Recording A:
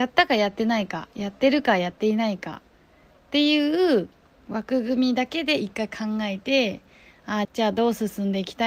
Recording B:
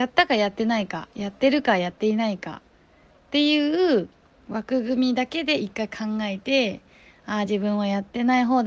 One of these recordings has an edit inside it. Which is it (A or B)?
A